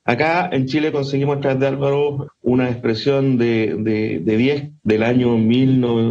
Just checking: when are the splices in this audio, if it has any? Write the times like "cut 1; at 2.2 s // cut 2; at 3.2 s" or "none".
cut 1; at 2.3 s // cut 2; at 4.8 s